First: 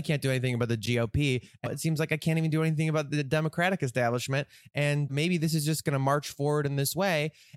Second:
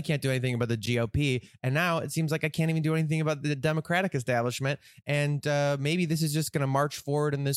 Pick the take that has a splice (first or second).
first